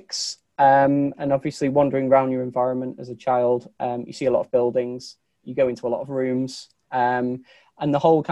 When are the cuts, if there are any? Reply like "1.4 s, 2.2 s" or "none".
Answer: none